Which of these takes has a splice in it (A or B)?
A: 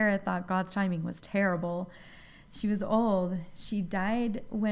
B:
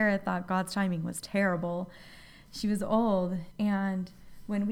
B